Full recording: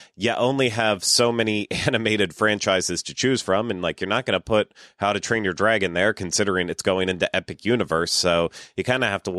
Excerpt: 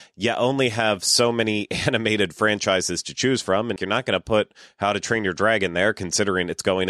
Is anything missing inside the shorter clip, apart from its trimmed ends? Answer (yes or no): yes